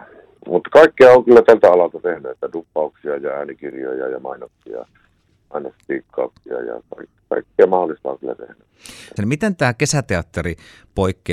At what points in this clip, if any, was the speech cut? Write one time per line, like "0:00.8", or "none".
0:09.2